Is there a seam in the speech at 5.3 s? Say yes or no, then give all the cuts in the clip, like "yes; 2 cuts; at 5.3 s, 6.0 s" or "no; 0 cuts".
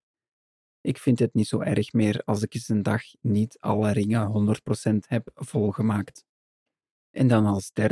no; 1 cut; at 6.9 s